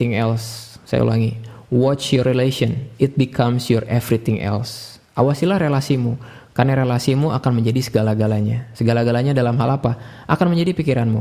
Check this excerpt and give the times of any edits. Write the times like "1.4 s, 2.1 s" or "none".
none